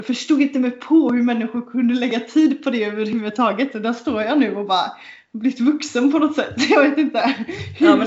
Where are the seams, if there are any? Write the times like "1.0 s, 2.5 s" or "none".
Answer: none